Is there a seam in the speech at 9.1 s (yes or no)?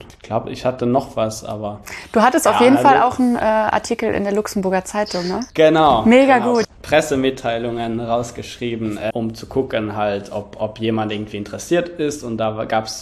yes